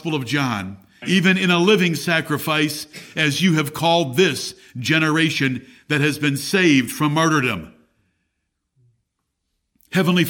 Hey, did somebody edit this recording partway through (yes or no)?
yes